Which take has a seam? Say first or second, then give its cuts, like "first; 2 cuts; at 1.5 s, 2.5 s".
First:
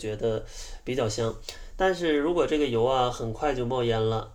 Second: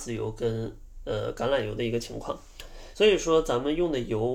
second; 1 cut; at 2.9 s